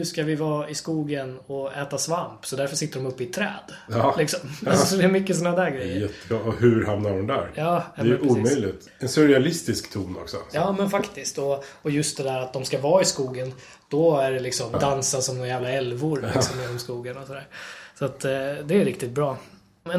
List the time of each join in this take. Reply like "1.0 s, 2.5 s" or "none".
14.7 s

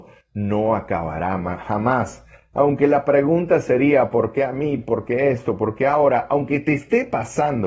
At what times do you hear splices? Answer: none

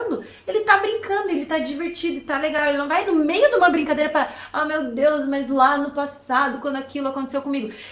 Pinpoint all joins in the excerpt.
none

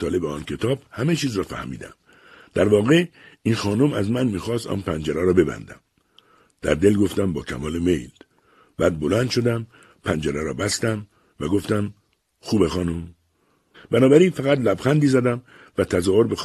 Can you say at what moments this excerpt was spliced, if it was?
13.7 s

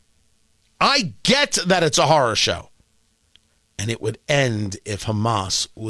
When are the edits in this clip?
none

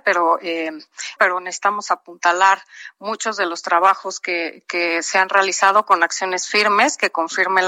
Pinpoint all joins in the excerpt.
1.2 s

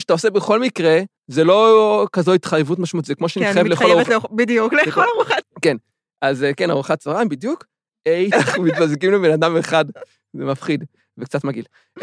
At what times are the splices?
1.2 s, 5.4 s, 8.3 s

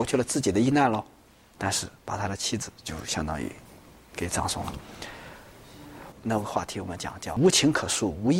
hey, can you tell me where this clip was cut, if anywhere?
6.1 s

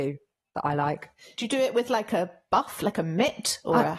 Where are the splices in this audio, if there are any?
none

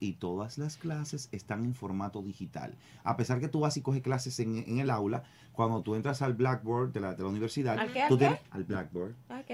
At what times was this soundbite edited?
none

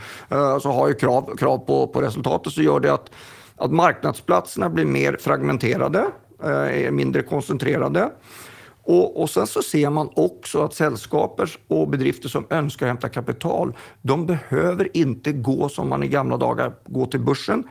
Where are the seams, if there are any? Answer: none

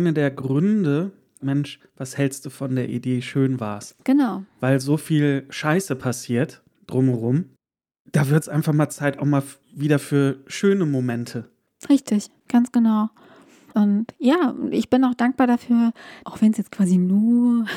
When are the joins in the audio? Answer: 1.4 s, 16.2 s

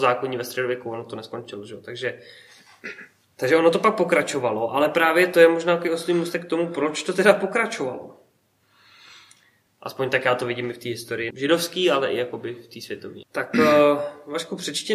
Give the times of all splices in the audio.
9.7 s, 11.3 s, 13.2 s

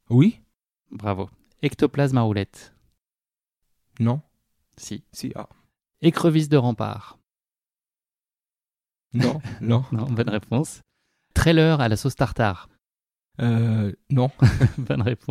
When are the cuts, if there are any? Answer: none

